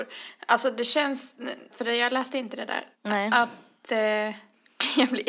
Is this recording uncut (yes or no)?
no